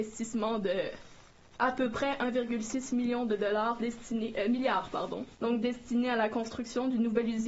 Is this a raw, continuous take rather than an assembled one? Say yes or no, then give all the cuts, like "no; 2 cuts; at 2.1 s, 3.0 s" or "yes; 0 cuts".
no; 1 cut; at 5.3 s